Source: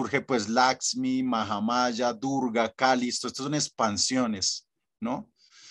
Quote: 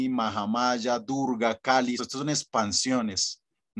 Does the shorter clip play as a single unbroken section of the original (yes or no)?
no